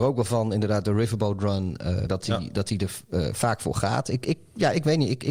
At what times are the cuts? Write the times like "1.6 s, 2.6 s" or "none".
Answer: 2.1 s